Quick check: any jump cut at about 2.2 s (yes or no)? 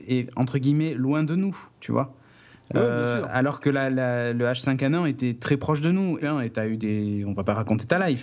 no